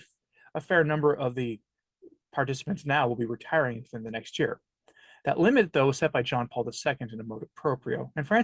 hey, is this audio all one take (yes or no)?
yes